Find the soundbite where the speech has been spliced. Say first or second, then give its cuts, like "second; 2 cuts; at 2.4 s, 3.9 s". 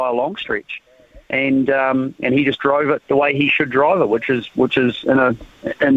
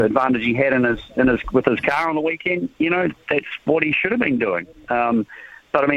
first; 1 cut; at 3.0 s